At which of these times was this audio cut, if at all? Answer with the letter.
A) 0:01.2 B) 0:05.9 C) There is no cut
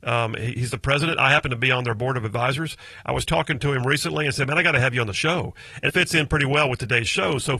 B